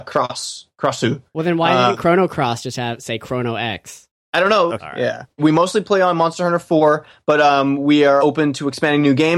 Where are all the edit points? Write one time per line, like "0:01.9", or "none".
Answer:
0:04.7
0:08.2